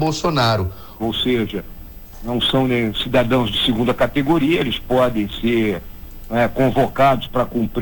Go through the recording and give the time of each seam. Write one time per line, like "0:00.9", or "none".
0:01.0